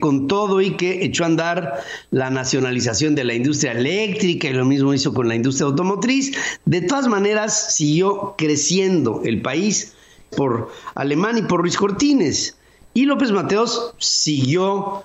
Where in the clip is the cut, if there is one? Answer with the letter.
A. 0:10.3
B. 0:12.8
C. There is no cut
A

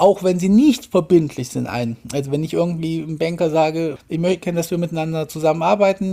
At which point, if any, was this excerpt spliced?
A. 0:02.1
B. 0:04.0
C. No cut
B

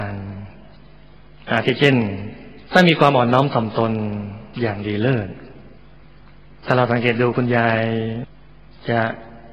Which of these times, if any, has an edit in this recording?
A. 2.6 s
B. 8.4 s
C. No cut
A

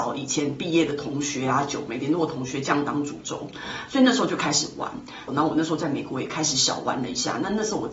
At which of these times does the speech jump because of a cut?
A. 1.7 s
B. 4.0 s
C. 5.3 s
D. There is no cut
C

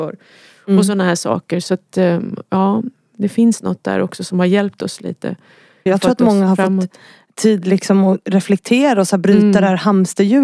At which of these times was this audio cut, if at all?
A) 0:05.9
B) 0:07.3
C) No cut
A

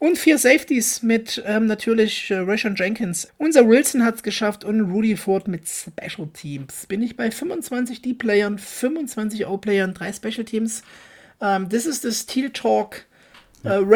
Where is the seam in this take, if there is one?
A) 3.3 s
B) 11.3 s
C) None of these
A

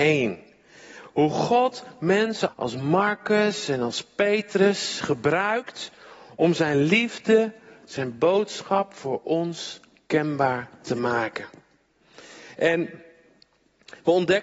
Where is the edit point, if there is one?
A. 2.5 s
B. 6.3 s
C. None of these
A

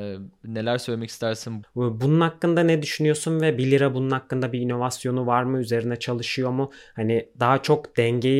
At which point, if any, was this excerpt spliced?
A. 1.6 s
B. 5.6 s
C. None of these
A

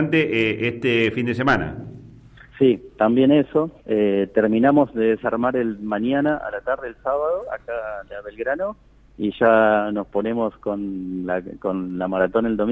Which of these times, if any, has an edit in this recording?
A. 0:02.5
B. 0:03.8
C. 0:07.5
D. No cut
B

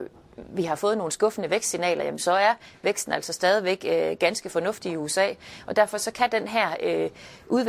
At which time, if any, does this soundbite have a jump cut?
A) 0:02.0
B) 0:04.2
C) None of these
C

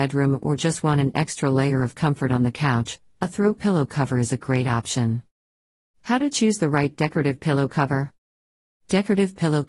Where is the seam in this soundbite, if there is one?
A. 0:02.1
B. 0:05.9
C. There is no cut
C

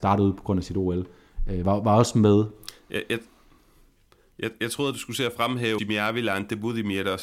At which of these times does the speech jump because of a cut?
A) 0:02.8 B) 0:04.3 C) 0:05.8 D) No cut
C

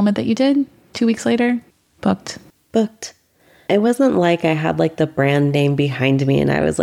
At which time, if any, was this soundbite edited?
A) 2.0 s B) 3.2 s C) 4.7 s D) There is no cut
A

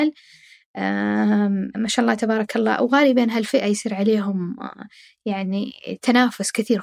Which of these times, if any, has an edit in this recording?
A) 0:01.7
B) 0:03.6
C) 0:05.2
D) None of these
A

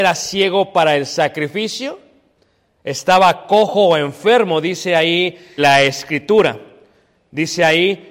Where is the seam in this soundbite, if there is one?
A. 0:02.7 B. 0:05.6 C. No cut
B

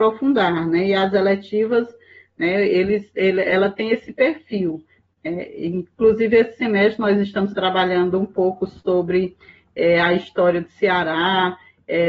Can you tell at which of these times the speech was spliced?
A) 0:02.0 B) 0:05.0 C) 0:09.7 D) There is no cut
D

